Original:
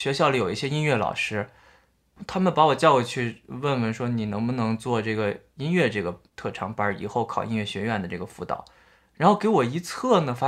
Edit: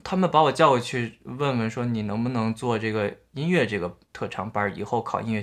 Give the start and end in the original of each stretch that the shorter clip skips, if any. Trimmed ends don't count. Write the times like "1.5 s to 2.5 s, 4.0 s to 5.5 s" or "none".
none